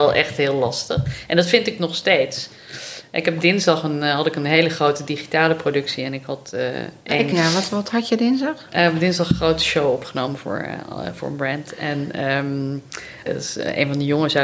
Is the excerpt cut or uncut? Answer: cut